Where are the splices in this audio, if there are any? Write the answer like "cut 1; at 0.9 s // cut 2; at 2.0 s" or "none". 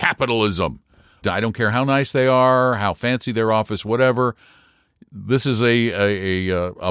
cut 1; at 1.2 s